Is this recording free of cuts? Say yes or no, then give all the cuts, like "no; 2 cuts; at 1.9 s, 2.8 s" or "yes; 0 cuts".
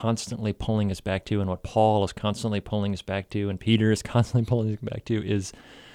yes; 0 cuts